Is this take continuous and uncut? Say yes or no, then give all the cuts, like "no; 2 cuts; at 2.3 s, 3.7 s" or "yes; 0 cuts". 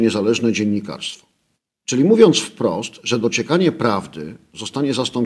yes; 0 cuts